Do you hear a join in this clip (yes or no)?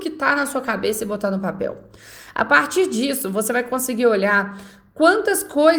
no